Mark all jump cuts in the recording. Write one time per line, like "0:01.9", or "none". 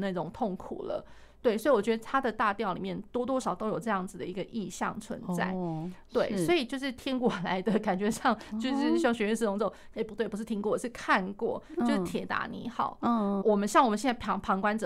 0:03.4
0:09.9
0:13.4